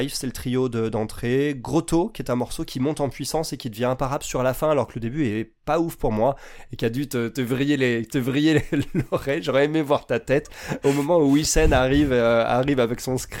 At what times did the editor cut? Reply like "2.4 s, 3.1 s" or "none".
6.7 s